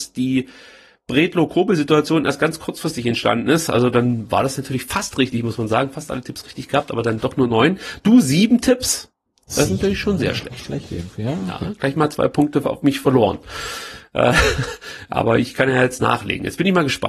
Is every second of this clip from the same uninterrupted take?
yes; 0 cuts

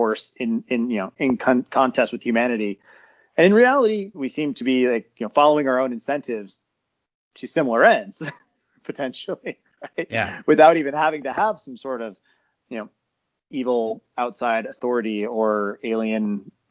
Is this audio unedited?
no; 1 cut; at 4.1 s

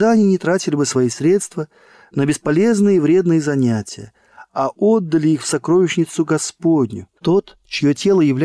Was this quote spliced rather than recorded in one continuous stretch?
yes; 1 cut; at 7.2 s

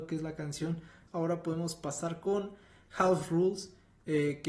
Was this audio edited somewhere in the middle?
yes; 1 cut; at 1.1 s

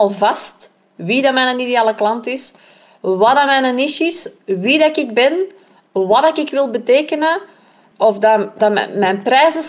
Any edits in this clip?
yes; 1 cut; at 8.6 s

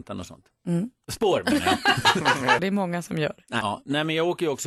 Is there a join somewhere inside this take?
yes; 3 cuts; at 1.0 s, 2.6 s, 3.6 s

